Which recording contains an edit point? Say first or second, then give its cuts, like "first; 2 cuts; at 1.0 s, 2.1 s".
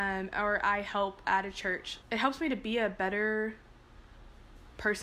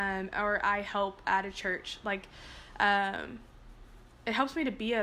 first; 1 cut; at 2.0 s